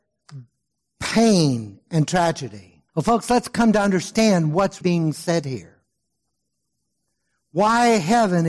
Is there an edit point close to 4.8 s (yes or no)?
yes